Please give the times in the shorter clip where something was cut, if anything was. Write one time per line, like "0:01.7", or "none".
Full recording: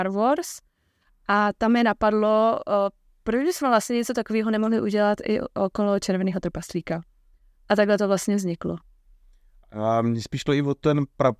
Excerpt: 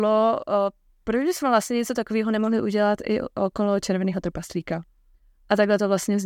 none